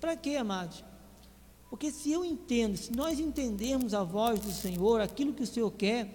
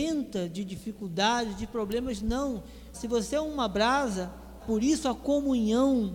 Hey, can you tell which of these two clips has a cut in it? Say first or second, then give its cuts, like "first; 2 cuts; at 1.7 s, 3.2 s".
second; 2 cuts; at 2.9 s, 4.6 s